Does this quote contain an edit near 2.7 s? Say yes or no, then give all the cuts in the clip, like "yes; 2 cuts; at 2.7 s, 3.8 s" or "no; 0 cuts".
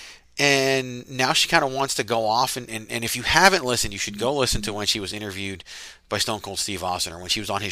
yes; 1 cut; at 2.7 s